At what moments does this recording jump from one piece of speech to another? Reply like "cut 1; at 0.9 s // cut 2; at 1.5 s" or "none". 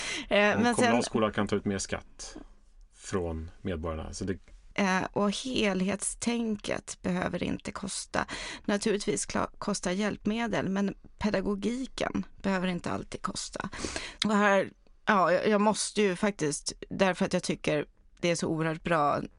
cut 1; at 2.9 s // cut 2; at 4.7 s // cut 3; at 14.2 s